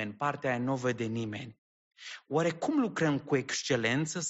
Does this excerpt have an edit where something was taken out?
no; 0 cuts

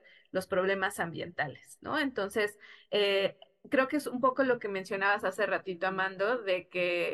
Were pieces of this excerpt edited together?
no; 0 cuts

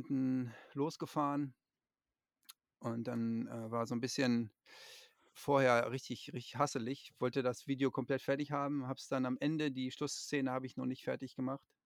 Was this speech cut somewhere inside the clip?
no; 0 cuts

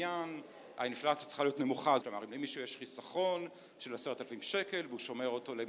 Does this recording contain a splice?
yes; 1 cut; at 2.0 s

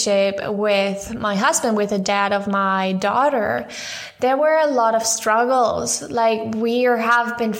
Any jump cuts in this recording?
no; 0 cuts

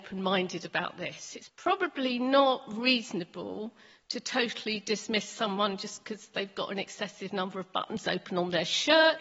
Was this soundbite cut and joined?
no; 0 cuts

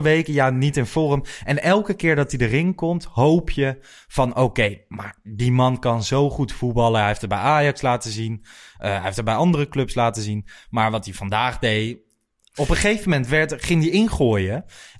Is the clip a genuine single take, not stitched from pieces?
yes; 0 cuts

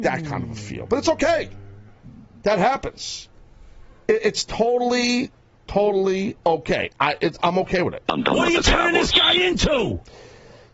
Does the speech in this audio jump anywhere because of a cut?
yes; 1 cut; at 6.4 s

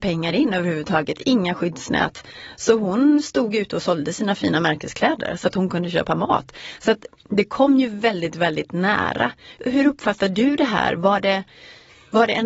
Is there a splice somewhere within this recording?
no; 0 cuts

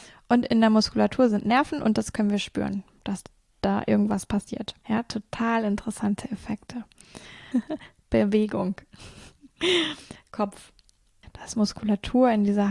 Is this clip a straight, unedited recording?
no; 3 cuts; at 4.8 s, 7.5 s, 11.2 s

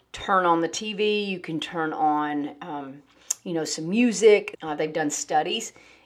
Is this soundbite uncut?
no; 1 cut; at 4.5 s

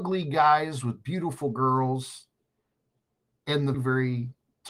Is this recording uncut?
no; 1 cut; at 3.7 s

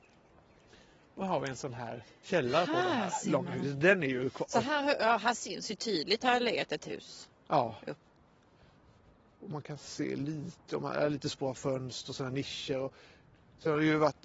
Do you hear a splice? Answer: no; 0 cuts

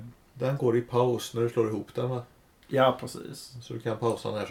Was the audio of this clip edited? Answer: no; 0 cuts

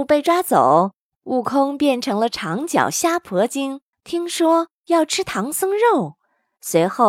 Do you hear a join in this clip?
yes; 1 cut; at 3.9 s

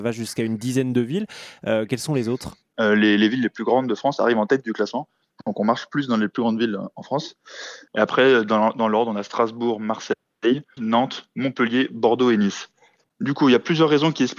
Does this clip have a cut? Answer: yes; 2 cuts; at 7.9 s, 10.8 s

